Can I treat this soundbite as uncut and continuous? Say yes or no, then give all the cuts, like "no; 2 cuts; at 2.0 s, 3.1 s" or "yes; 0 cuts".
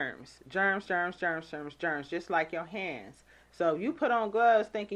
yes; 0 cuts